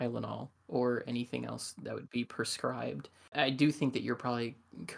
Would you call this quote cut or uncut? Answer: cut